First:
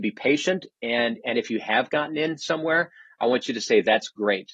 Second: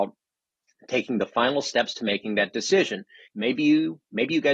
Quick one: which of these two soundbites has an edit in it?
second; 1 cut; at 3.3 s

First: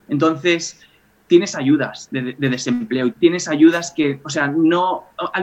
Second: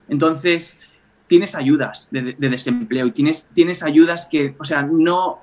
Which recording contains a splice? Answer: first; 1 cut; at 3.1 s

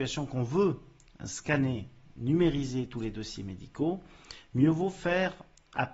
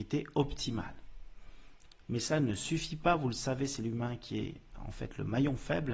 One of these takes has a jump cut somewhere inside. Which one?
second; 1 cut; at 2.0 s

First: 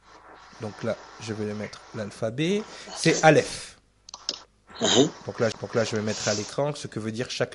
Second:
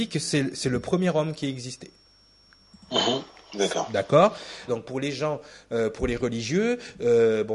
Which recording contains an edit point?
second; 1 cut; at 4.7 s

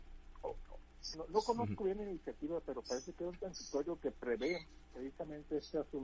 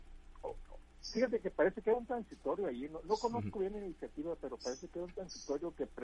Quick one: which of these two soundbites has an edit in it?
first; 1 cut; at 1.1 s

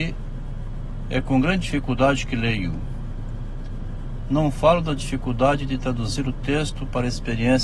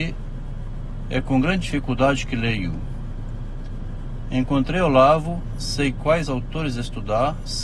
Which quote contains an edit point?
second; 1 cut; at 4.2 s

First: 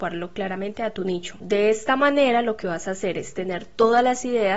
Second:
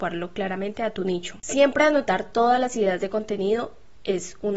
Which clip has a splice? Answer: first; 1 cut; at 1.4 s

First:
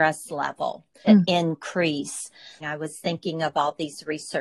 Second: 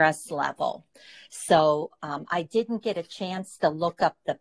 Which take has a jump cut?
first; 2 cuts; at 1.0 s, 2.6 s

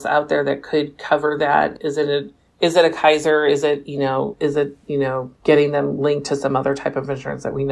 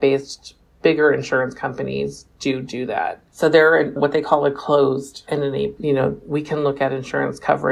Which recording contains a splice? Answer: second; 2 cuts; at 3.3 s, 5.8 s

